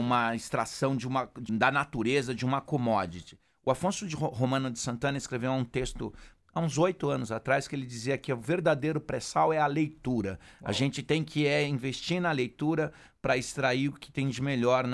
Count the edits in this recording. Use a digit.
1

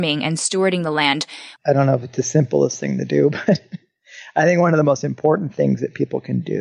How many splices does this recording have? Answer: 1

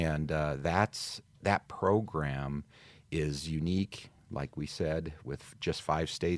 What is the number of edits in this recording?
0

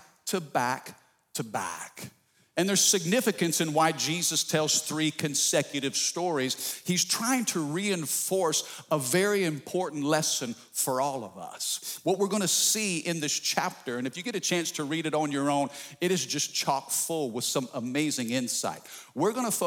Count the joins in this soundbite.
0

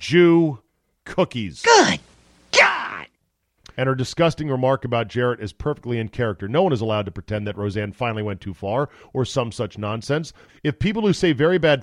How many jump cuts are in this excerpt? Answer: 2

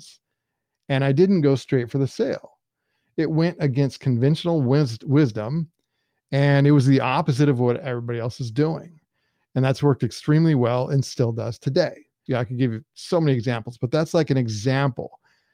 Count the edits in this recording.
1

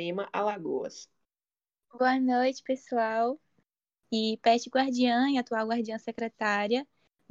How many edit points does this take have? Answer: 2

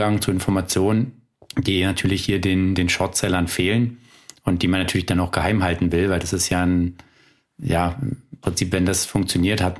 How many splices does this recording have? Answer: 0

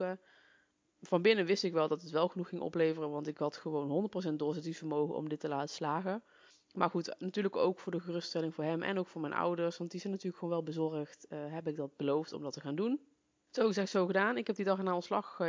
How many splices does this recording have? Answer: 0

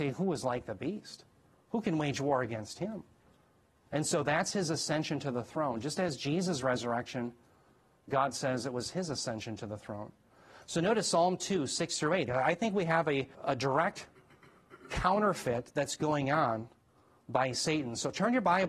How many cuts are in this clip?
2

